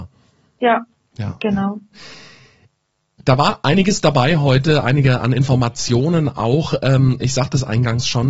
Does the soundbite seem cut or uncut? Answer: uncut